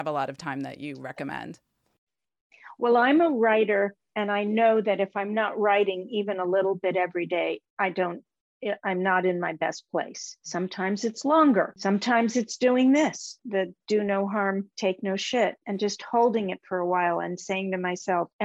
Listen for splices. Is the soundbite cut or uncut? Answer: cut